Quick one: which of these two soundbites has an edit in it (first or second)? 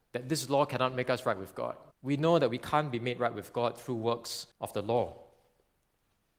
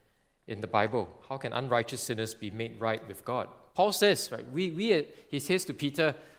first